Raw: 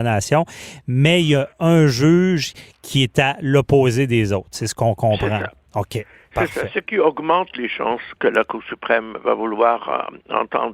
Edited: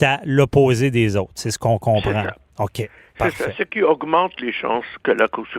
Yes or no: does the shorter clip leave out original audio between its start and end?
no